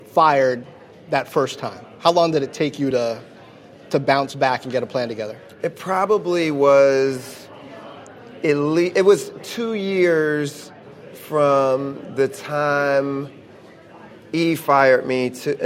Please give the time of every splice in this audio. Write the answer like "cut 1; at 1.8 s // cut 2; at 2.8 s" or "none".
none